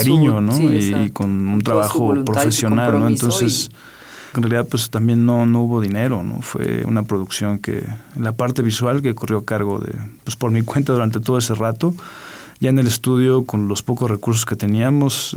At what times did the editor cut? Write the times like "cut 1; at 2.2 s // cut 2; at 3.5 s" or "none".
cut 1; at 4.3 s